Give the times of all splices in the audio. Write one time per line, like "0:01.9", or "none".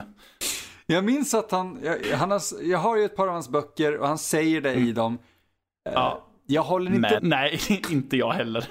0:07.2